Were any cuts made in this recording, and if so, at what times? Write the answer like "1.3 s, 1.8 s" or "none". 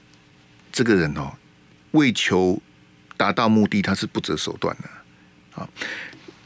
none